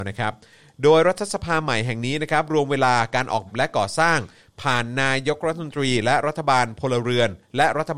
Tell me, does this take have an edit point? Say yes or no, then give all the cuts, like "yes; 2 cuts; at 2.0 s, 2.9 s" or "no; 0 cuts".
yes; 1 cut; at 3.5 s